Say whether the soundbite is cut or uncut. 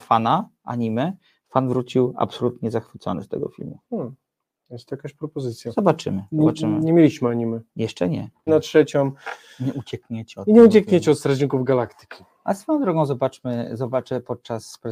cut